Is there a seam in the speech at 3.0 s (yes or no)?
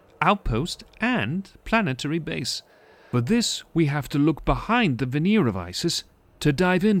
no